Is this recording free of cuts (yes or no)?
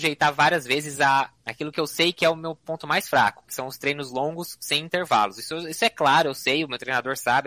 no